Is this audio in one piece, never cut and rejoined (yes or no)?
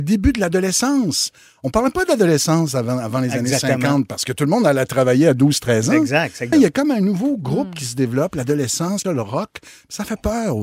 no